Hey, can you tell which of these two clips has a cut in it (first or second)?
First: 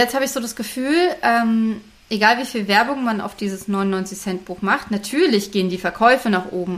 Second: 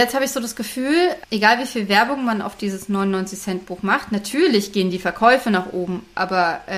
second